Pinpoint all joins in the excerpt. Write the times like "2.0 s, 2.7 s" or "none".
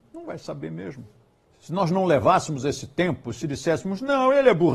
1.5 s